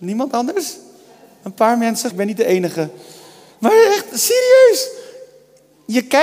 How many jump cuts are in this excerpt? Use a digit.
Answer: 1